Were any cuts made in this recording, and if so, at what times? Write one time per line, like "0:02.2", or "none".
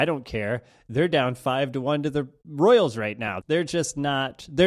0:03.4